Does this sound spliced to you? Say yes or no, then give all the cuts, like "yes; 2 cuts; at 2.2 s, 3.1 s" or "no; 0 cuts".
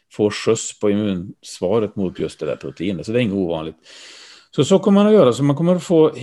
no; 0 cuts